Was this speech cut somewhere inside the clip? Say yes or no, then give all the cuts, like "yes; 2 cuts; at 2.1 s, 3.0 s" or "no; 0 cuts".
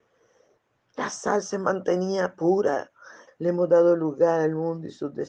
yes; 1 cut; at 3.3 s